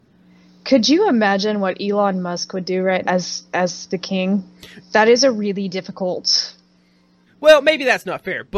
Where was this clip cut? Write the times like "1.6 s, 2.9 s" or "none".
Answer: 3.0 s, 4.8 s, 7.3 s